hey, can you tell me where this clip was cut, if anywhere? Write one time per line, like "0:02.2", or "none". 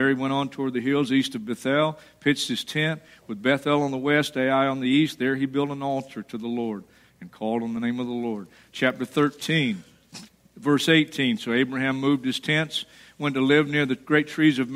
none